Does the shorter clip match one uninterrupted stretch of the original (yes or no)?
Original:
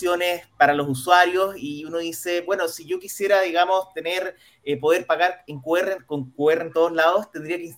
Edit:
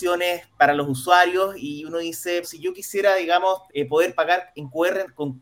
no